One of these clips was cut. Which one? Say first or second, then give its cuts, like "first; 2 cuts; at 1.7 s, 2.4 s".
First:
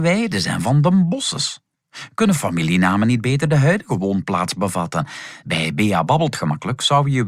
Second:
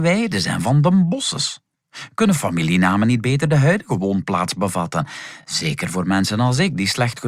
first; 1 cut; at 5.4 s